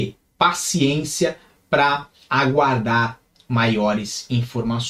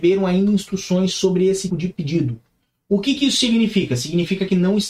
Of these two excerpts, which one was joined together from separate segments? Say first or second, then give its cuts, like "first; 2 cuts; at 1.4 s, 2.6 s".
second; 1 cut; at 1.7 s